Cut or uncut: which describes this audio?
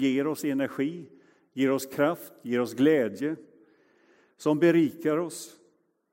uncut